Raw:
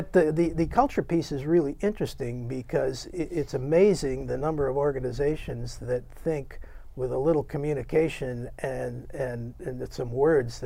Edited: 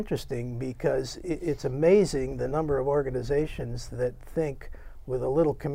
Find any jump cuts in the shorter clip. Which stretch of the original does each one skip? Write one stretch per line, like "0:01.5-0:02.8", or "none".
none